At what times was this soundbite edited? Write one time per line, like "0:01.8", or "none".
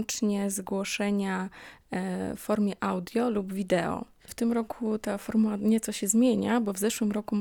0:04.2

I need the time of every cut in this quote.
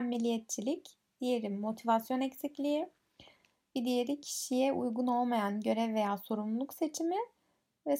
none

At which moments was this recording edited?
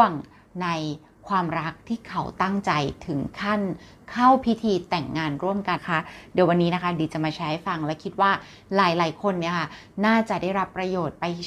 0:05.8

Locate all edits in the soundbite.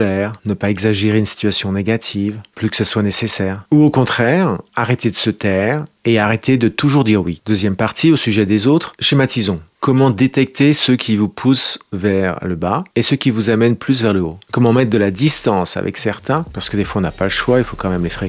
0:09.7

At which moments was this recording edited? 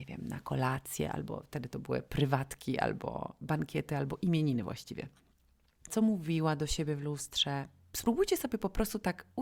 0:05.9

